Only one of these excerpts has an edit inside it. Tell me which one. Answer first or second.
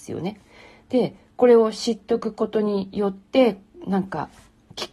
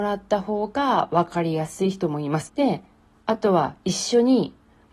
second